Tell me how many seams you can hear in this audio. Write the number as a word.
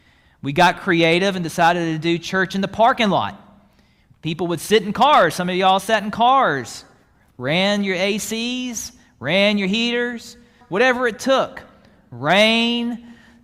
one